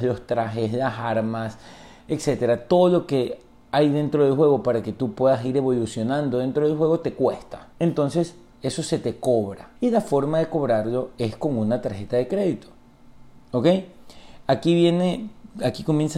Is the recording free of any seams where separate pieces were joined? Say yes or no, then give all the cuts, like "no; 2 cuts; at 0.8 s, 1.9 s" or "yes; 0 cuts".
no; 2 cuts; at 7.7 s, 9.8 s